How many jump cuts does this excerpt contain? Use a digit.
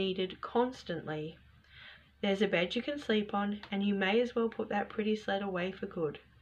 1